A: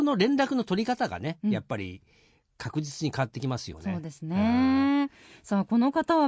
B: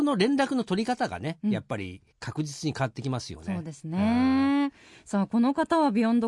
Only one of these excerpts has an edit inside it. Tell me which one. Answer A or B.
B